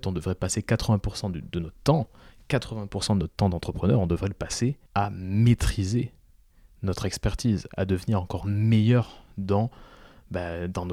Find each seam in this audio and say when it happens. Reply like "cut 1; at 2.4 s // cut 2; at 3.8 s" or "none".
cut 1; at 4.9 s // cut 2; at 7.7 s